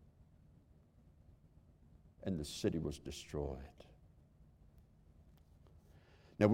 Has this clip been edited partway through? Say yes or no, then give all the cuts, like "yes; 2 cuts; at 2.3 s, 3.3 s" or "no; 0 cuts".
no; 0 cuts